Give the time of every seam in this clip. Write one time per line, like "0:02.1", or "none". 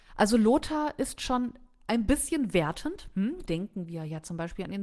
0:03.5